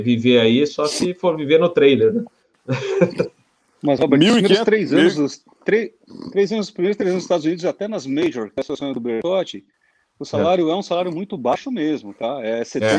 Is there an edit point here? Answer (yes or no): no